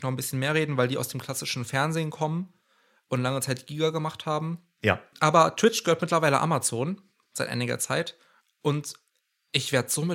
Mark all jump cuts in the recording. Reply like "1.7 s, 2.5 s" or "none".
5.1 s